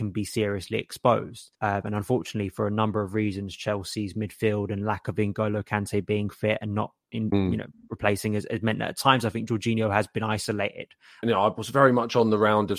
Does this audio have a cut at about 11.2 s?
yes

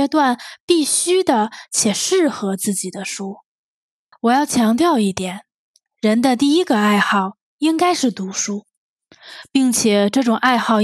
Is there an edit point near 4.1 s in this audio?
yes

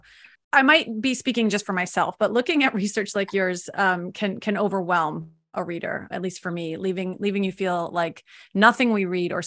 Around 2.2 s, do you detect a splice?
no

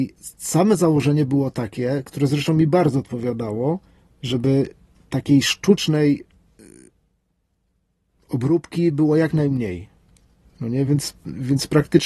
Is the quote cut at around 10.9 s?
no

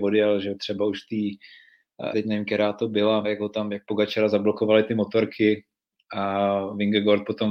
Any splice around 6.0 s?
no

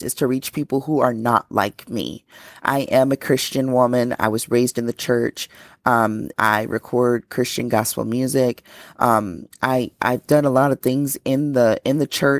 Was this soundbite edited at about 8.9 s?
no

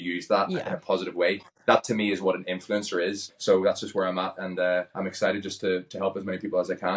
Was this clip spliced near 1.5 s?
no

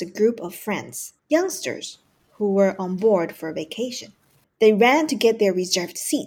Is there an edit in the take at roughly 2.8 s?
no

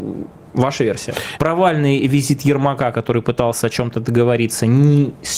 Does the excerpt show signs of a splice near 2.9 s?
no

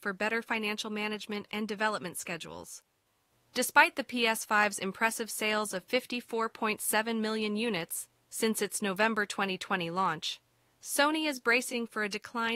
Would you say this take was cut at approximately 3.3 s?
yes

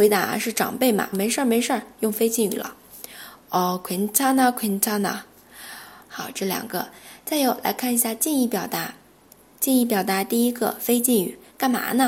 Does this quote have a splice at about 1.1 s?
yes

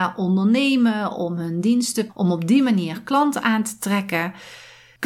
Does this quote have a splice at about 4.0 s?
no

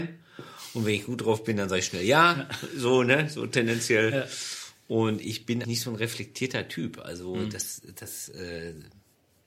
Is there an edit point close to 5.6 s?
yes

